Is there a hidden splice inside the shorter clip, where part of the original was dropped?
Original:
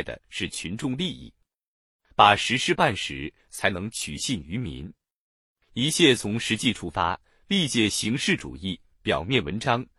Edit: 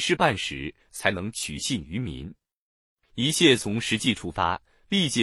no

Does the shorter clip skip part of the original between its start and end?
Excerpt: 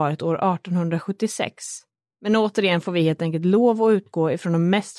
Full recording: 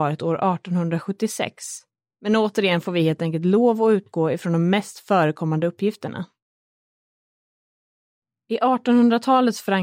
no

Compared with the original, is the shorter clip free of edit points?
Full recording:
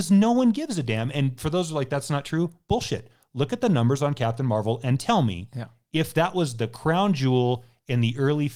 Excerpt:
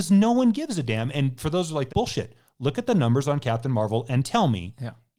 no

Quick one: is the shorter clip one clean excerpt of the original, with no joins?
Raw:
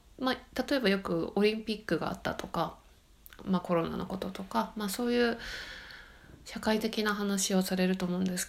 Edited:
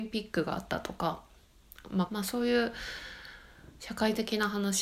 no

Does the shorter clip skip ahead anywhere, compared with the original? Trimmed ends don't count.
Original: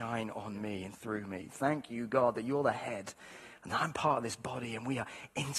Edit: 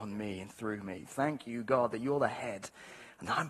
no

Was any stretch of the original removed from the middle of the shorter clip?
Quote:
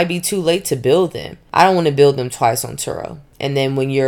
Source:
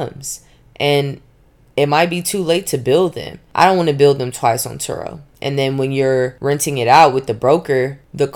no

